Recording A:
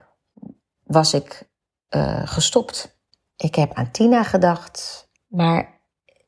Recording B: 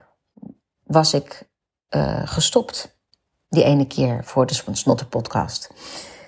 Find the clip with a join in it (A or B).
A